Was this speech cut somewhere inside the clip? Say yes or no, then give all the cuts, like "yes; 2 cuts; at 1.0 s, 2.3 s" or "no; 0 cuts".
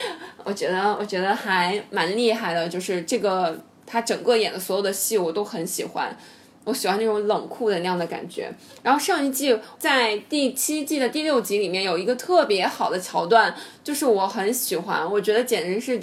no; 0 cuts